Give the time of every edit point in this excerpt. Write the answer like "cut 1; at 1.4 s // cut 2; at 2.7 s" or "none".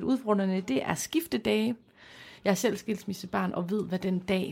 cut 1; at 2.4 s